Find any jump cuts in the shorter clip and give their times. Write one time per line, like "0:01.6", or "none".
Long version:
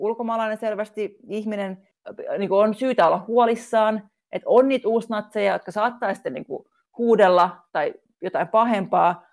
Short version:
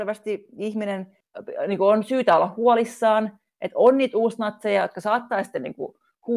none